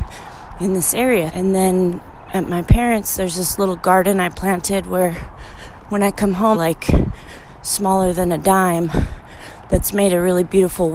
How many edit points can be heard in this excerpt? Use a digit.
2